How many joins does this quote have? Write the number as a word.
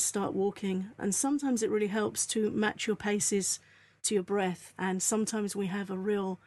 one